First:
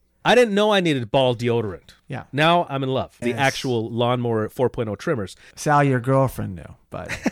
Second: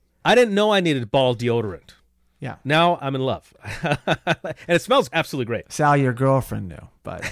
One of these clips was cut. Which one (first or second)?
first